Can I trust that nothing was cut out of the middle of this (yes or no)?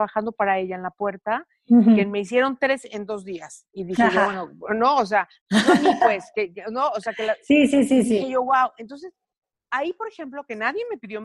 yes